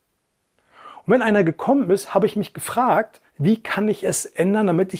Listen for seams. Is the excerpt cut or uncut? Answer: cut